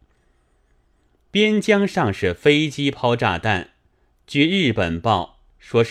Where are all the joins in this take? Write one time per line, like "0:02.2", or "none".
none